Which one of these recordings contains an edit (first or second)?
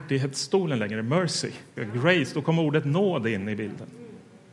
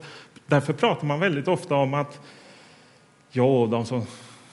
first